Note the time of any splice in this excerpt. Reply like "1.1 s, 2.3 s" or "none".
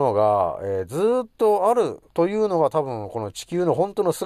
2.1 s